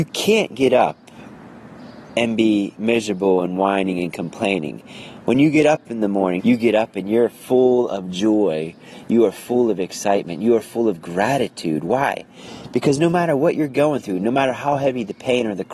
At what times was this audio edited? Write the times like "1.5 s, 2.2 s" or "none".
6.4 s